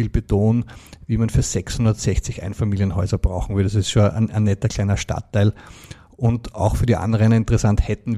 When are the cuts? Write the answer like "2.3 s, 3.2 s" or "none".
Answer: none